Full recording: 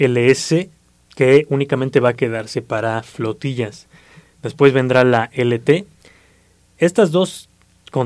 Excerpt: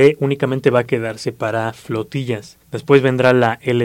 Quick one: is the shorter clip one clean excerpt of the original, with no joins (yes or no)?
no